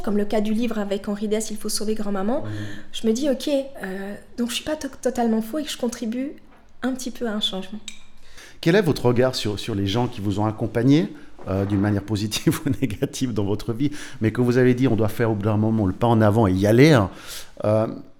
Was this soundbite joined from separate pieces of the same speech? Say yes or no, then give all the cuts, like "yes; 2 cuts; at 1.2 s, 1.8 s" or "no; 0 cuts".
no; 0 cuts